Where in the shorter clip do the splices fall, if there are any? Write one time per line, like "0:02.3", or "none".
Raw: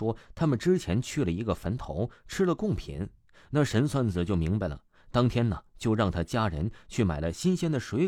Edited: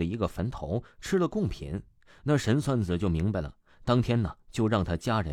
none